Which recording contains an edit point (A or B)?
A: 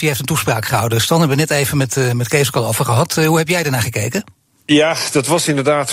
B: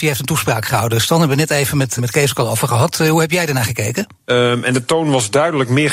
B